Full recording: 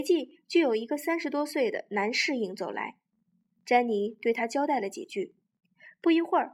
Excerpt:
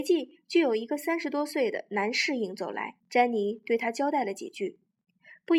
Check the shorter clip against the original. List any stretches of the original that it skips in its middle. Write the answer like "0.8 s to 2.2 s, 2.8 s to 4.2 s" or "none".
3.0 s to 3.5 s